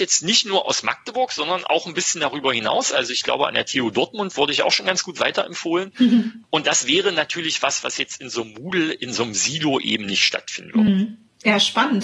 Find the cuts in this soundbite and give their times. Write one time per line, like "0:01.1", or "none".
none